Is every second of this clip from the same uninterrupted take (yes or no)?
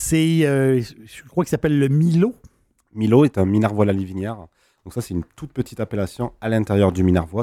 yes